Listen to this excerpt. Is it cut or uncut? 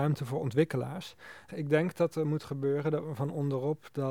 cut